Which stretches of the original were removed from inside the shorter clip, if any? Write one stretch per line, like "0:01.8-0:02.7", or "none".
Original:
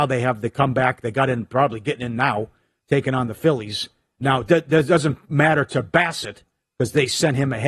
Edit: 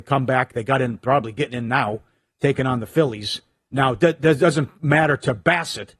none

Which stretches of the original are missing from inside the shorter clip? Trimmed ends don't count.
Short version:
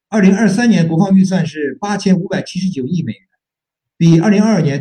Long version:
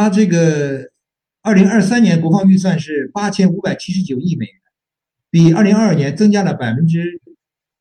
none

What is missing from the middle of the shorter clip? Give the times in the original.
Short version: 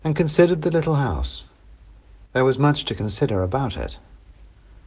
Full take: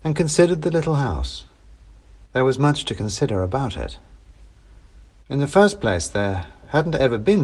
none

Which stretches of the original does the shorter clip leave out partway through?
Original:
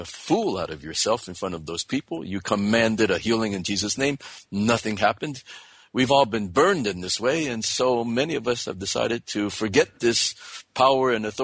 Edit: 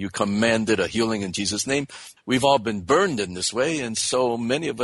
0:04.5-0:05.8

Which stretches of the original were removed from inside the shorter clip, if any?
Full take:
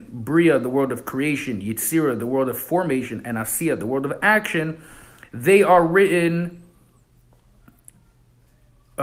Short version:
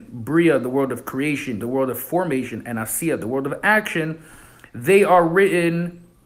0:01.6-0:02.2

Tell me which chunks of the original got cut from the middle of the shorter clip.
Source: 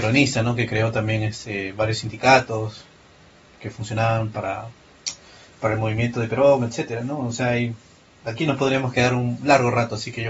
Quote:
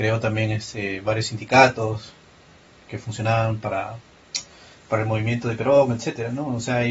none

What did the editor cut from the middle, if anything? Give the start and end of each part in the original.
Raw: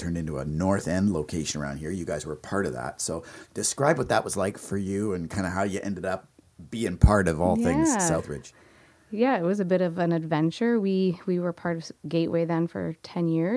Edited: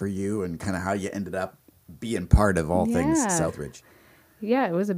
none

